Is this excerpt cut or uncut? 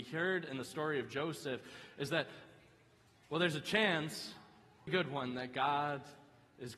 cut